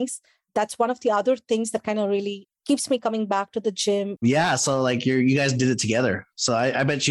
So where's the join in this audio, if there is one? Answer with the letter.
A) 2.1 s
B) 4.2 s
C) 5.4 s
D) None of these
B